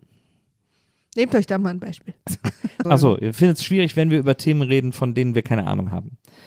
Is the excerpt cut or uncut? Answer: cut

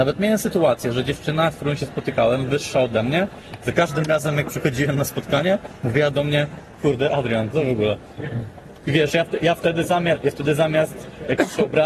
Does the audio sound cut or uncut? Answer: cut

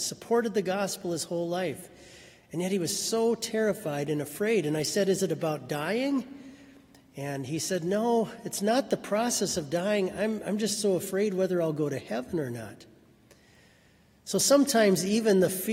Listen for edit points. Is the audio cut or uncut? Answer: uncut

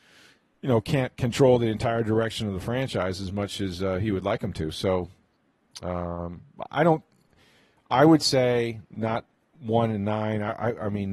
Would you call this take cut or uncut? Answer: uncut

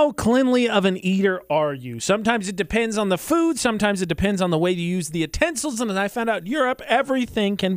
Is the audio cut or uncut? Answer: uncut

